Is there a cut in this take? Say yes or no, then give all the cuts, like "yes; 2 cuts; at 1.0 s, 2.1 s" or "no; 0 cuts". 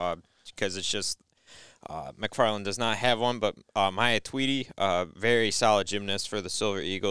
no; 0 cuts